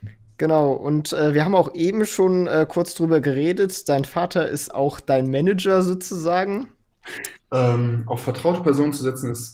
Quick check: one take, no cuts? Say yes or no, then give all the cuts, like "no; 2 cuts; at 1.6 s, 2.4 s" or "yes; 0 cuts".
no; 1 cut; at 7.4 s